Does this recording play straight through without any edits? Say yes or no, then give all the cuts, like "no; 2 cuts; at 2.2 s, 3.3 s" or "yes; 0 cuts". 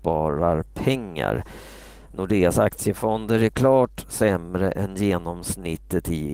yes; 0 cuts